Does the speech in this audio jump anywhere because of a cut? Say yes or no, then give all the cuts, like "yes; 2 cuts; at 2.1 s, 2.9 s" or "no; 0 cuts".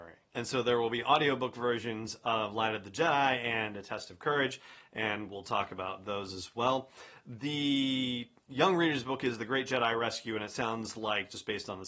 no; 0 cuts